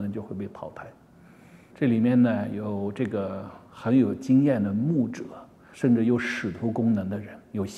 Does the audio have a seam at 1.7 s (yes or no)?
yes